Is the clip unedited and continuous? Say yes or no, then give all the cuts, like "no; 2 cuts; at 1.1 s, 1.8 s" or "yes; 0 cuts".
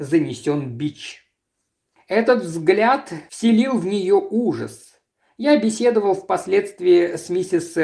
yes; 0 cuts